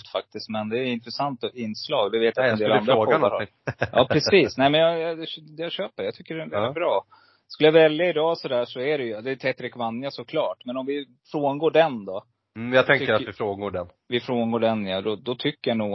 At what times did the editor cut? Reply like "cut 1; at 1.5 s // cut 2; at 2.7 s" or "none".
none